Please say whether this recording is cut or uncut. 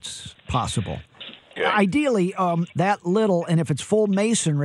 cut